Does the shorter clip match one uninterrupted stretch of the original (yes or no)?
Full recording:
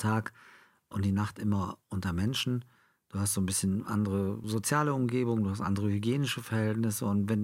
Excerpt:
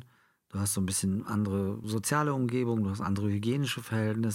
yes